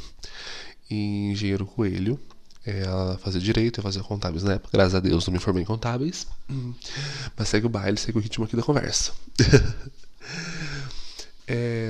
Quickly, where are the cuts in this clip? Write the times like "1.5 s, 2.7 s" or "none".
none